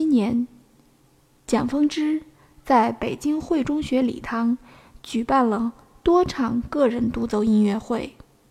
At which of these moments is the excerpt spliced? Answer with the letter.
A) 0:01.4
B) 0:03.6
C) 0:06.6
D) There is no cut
B